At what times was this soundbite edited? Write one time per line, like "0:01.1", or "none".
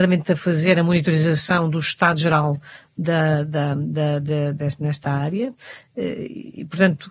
0:04.5